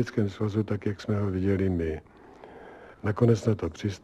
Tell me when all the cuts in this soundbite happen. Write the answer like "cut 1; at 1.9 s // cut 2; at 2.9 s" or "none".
cut 1; at 2.9 s